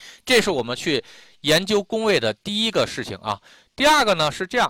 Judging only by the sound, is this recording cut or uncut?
uncut